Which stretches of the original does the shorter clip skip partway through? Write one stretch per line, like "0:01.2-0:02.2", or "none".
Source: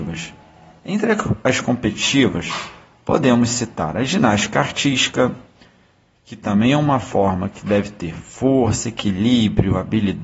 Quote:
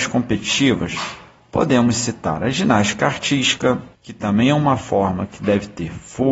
0:05.5-0:06.2